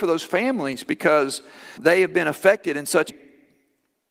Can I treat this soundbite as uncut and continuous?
no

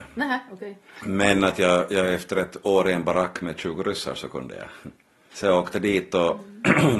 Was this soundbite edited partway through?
no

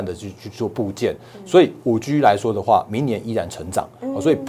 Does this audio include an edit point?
no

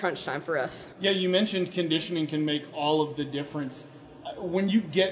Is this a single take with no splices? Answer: no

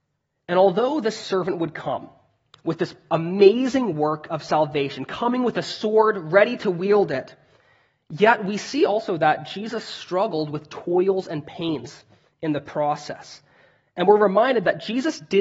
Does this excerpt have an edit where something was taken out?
no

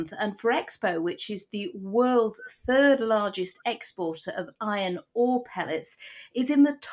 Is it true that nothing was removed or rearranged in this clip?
yes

